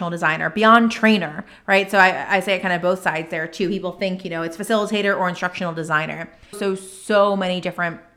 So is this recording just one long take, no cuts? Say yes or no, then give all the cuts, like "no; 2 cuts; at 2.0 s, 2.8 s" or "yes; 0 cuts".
no; 1 cut; at 6.5 s